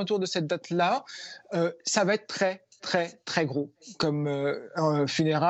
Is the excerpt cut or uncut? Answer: uncut